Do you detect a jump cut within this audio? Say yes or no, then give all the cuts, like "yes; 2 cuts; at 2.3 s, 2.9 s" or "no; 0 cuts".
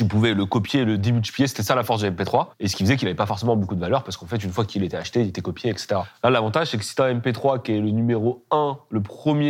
no; 0 cuts